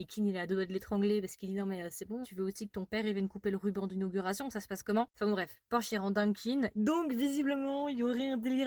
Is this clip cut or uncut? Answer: cut